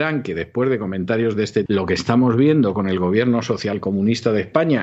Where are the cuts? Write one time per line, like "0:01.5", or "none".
0:01.7